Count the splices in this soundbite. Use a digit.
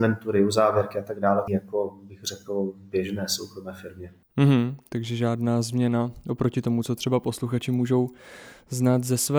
1